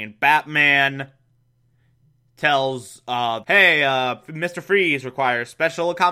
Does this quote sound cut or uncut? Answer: cut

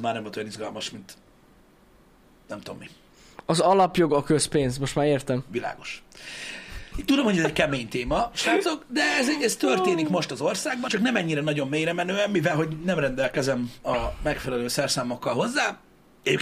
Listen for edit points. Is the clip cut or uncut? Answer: cut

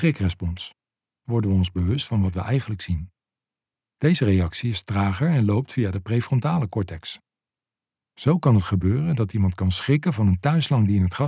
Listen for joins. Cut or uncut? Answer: cut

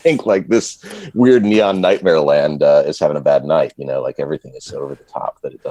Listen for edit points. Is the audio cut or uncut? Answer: uncut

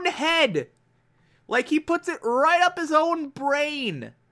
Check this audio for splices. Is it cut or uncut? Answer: uncut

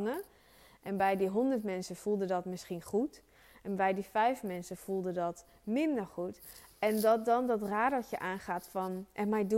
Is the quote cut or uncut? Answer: uncut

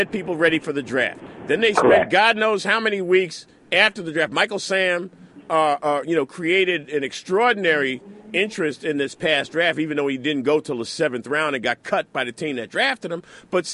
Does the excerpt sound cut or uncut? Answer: uncut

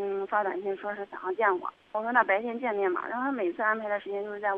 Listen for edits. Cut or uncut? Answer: cut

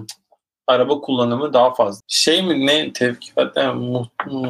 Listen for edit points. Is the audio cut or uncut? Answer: cut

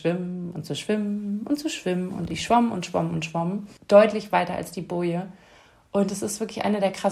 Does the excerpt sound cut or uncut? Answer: cut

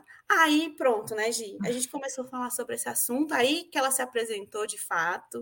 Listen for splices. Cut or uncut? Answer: uncut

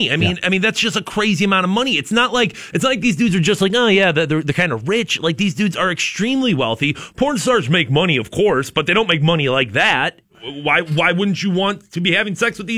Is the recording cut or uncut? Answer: cut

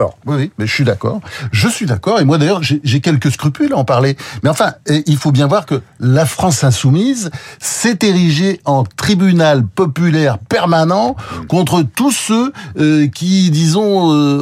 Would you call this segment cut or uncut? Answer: uncut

